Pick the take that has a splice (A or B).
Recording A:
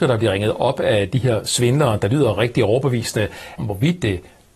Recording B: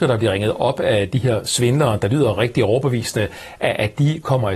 A